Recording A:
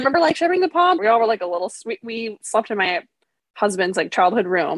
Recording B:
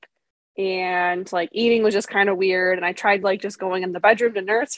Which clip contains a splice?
A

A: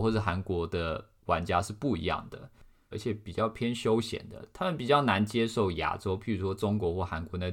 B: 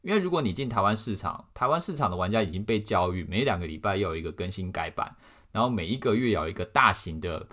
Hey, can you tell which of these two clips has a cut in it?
A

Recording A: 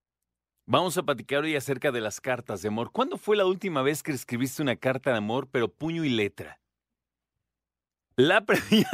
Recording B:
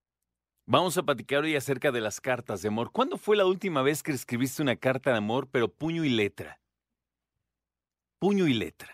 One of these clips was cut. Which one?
A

